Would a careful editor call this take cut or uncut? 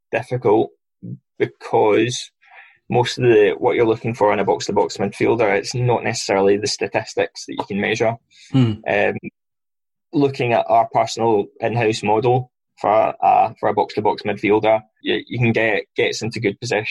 cut